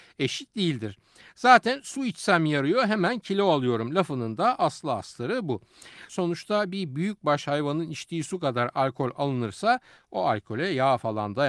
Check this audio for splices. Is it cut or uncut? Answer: cut